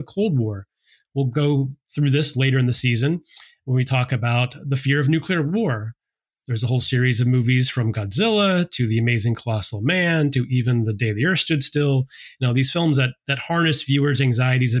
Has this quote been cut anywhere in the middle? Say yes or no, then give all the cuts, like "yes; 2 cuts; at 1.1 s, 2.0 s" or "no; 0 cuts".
no; 0 cuts